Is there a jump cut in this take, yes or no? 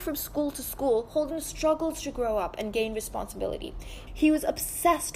yes